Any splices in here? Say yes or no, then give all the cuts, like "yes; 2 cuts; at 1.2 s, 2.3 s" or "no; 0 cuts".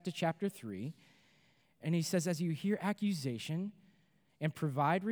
no; 0 cuts